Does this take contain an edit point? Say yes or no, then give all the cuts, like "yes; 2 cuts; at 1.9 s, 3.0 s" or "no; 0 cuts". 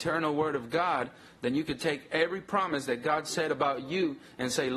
no; 0 cuts